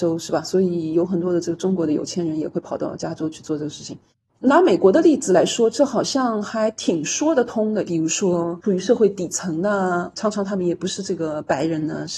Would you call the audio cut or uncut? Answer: cut